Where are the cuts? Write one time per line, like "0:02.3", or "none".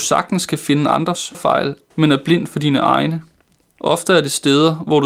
0:03.7